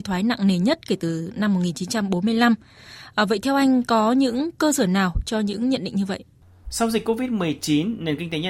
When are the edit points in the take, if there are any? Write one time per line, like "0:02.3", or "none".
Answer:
0:06.6

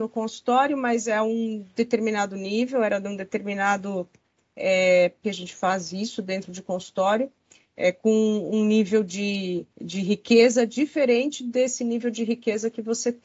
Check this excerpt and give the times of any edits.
0:05.2
0:09.7

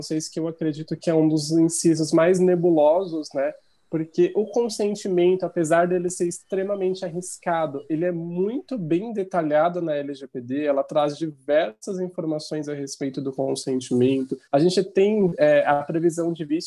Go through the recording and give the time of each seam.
0:14.5

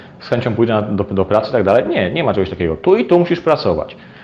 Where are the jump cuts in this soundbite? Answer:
none

